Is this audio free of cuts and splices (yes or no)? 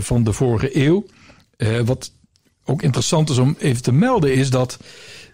yes